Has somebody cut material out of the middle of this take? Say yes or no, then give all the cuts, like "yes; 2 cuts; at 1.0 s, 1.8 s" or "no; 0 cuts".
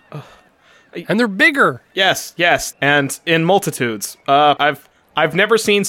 yes; 2 cuts; at 2.7 s, 4.6 s